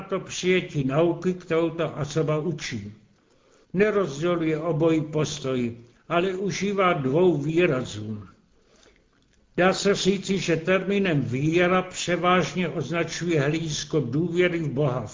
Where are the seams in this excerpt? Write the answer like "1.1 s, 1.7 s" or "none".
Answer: 3.6 s